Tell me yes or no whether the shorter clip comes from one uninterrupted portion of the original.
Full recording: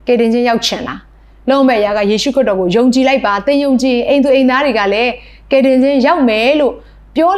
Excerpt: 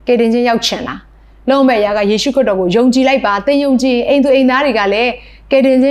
yes